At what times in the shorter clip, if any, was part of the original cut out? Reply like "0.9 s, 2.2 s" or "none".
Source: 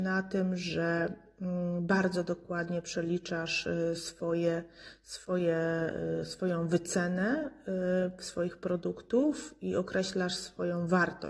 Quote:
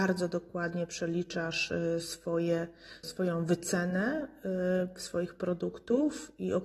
3.0 s